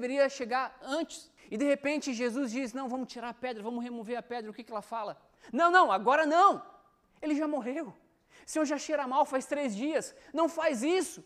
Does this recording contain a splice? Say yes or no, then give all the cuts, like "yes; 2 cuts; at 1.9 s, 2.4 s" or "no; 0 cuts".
no; 0 cuts